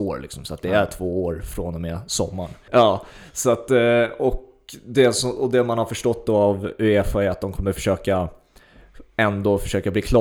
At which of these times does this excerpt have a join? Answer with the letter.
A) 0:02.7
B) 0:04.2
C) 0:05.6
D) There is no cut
A